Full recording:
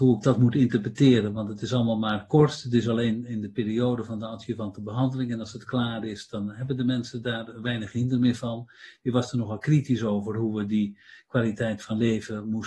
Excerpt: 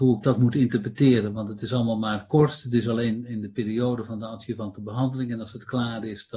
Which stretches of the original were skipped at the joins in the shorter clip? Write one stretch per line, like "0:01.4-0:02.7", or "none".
none